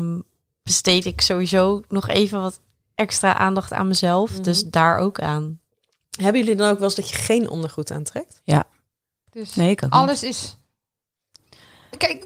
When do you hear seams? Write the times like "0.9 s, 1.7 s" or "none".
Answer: 9.3 s

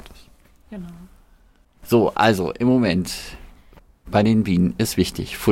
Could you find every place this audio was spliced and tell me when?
none

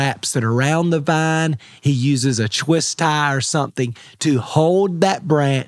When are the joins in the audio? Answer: none

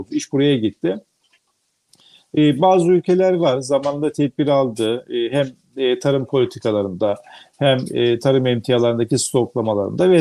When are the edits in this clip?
none

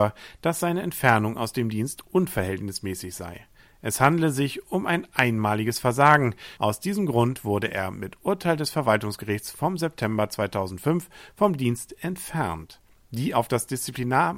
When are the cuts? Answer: 6.6 s

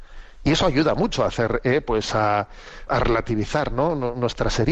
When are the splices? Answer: 2.9 s

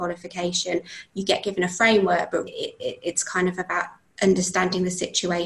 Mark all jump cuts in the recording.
2.5 s

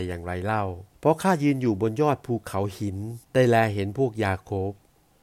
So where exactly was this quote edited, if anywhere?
0.9 s, 3.2 s

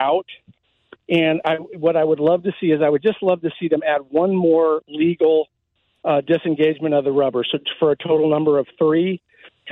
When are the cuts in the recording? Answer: none

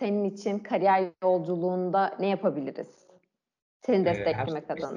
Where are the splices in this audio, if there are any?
none

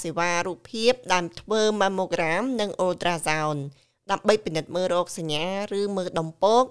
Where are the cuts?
none

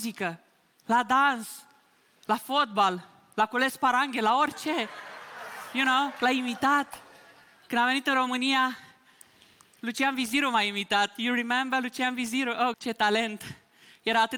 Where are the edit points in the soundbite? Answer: 12.7 s

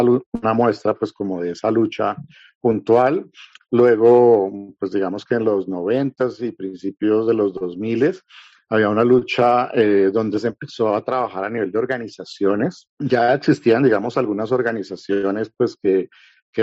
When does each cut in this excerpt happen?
none

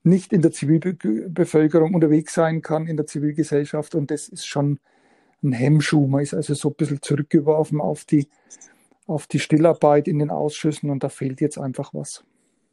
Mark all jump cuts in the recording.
none

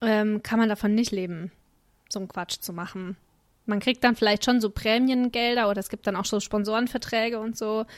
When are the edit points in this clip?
none

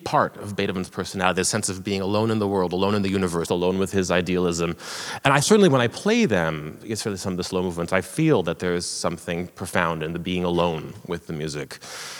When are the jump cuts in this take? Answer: 3.5 s

